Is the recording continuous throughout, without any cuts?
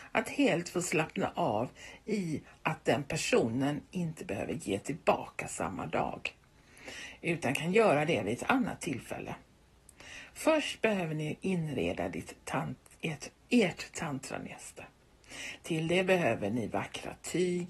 yes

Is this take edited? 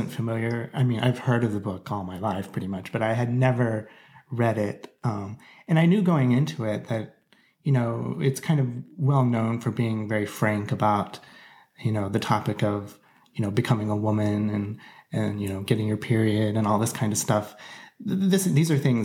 no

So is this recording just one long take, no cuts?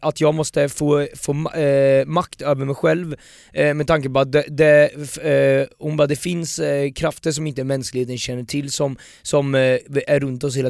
yes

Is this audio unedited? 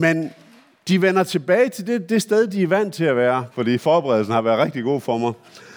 no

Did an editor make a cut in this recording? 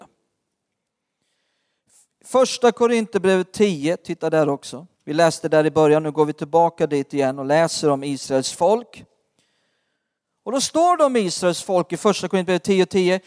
yes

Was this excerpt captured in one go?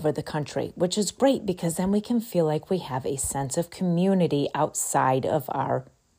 yes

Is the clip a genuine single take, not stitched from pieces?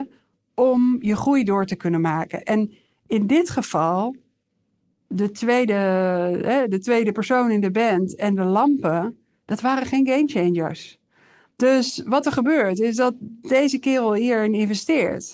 yes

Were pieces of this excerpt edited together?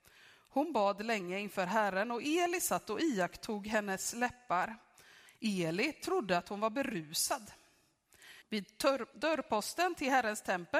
yes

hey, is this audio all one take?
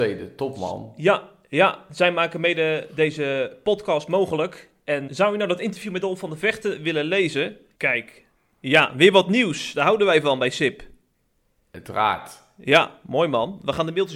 no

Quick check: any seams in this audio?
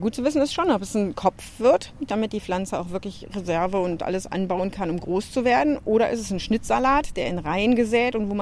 yes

